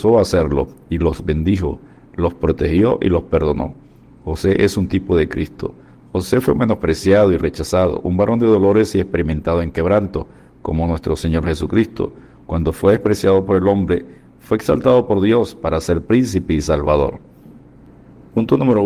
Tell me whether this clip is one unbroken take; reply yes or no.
yes